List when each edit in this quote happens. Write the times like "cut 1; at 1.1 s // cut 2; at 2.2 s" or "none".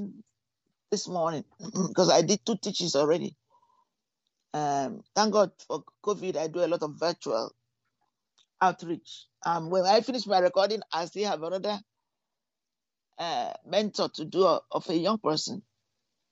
none